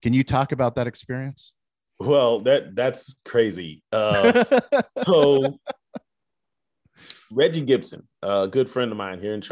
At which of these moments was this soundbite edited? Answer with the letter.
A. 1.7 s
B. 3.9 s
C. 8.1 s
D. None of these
D